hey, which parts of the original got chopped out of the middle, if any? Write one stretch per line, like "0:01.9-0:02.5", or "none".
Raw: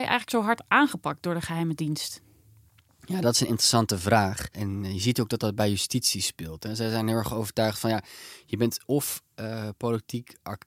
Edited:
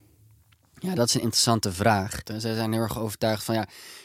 0:04.5-0:06.6